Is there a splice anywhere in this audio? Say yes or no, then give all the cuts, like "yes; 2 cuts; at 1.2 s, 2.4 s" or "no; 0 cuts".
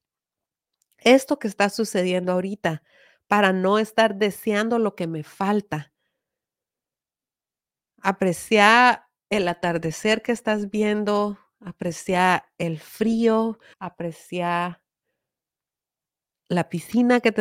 yes; 1 cut; at 13.7 s